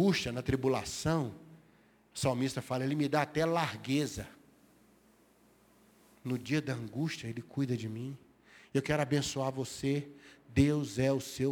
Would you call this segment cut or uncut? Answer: uncut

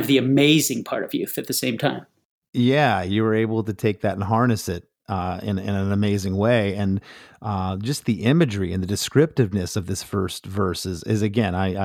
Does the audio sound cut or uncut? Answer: uncut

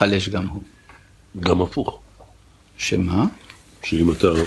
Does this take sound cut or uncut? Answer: uncut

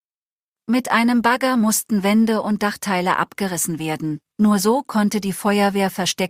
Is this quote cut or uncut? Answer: uncut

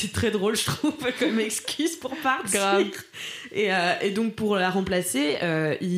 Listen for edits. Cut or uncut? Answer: uncut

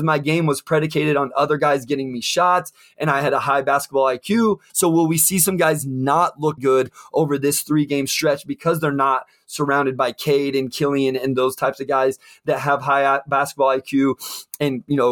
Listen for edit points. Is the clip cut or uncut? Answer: cut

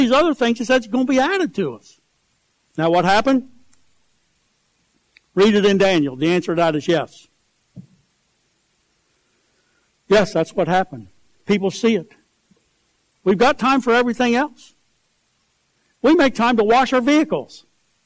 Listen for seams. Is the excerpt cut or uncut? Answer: cut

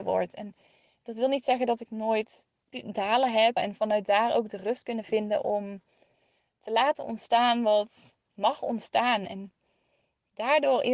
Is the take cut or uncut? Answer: cut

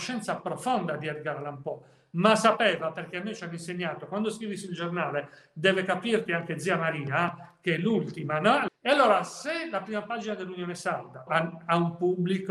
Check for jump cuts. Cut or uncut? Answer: cut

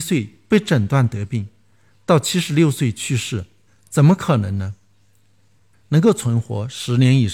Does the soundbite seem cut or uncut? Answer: cut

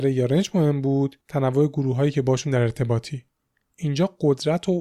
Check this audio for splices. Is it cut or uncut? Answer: uncut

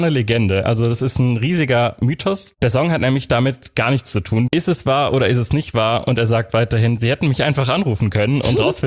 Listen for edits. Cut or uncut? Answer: cut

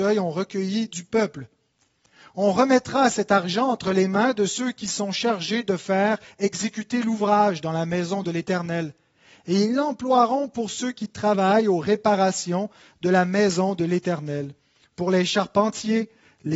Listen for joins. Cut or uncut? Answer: uncut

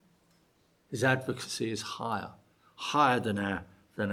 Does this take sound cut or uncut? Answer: uncut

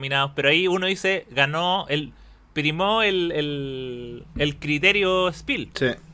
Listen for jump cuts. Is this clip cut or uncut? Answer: uncut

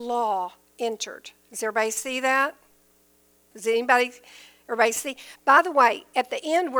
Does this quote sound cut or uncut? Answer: cut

